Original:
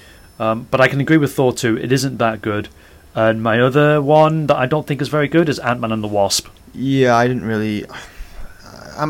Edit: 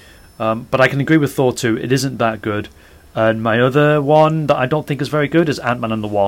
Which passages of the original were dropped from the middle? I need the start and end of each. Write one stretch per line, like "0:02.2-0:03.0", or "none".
none